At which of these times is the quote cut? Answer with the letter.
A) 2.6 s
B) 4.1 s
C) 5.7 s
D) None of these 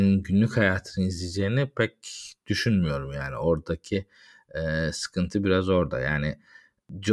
D